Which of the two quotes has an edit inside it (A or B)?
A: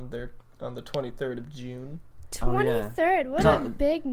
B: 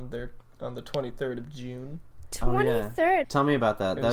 B